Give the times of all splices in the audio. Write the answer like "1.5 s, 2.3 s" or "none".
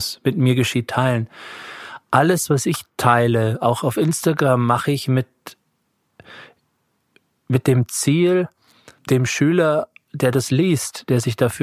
none